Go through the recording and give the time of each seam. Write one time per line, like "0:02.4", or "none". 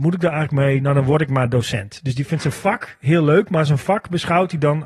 none